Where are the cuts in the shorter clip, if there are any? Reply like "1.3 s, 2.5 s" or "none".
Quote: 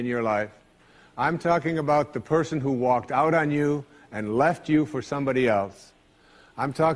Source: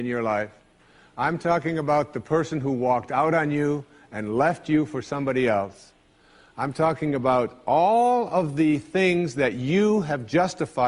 none